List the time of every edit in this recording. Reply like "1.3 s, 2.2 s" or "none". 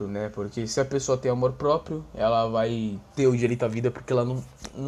none